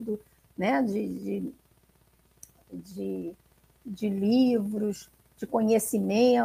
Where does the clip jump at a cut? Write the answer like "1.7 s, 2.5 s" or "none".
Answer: none